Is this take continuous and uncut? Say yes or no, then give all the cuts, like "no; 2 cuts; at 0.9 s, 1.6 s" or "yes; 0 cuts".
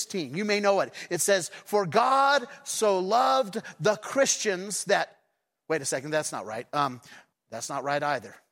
no; 1 cut; at 7.3 s